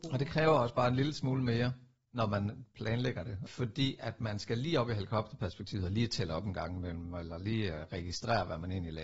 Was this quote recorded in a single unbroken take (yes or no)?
no